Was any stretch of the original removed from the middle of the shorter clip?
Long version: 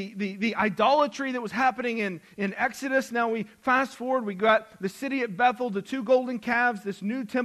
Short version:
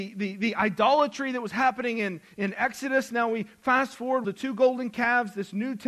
yes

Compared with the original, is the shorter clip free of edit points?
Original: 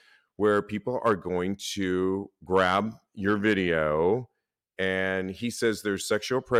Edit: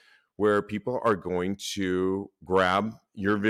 yes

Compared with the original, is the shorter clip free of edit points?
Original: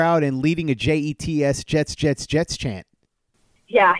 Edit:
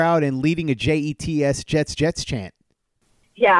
no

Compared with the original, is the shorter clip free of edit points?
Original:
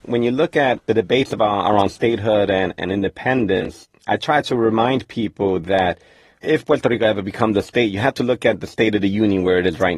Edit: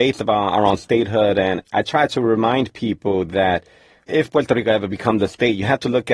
no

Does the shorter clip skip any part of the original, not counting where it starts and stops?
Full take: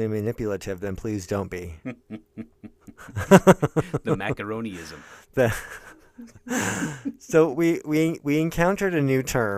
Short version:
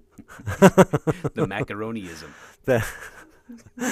no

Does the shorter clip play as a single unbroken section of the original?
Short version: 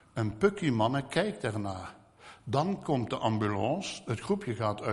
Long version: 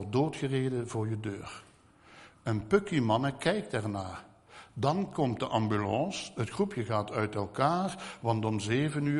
yes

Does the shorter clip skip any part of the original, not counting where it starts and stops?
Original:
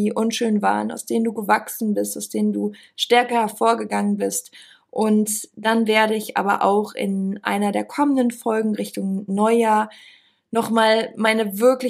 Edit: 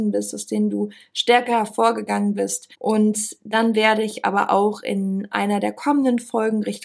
yes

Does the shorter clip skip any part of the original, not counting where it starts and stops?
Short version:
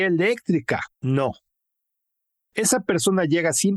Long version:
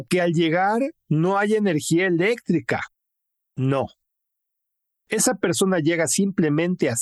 yes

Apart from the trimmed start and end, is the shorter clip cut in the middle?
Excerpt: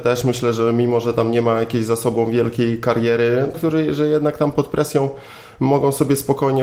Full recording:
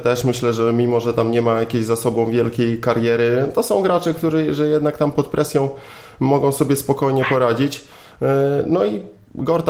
yes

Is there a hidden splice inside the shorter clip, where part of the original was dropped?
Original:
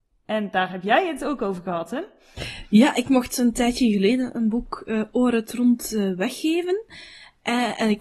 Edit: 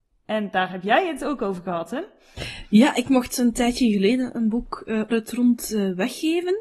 yes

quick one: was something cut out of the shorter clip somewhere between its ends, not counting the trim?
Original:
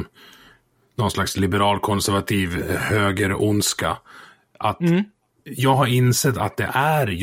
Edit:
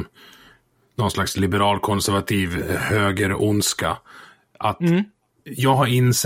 no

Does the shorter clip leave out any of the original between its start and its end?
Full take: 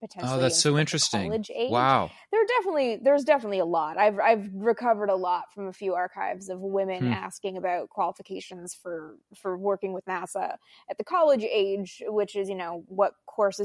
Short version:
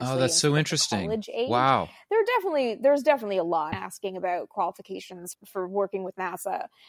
yes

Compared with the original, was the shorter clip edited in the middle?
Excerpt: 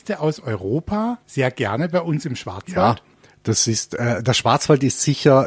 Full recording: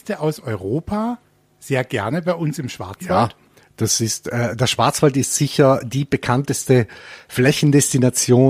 yes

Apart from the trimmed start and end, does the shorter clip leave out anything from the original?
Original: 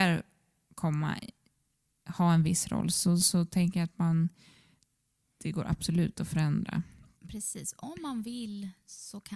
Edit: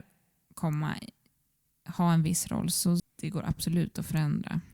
yes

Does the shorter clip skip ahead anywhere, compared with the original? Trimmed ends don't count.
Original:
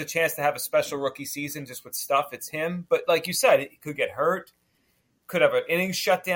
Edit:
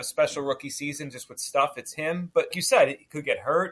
yes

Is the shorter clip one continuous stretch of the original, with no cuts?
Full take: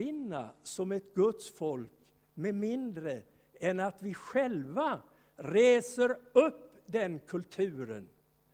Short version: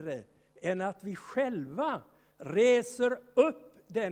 yes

